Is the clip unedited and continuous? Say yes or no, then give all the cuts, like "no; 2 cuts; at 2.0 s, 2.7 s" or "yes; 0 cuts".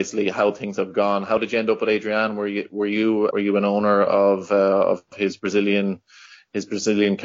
no; 1 cut; at 3.3 s